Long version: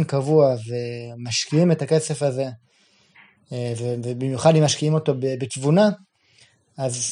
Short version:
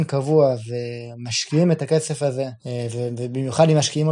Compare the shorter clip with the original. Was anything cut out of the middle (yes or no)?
yes